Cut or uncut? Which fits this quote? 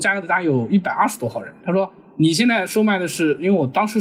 uncut